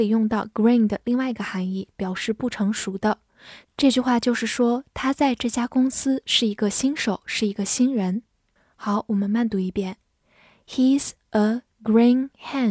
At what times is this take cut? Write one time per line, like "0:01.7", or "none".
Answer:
0:03.6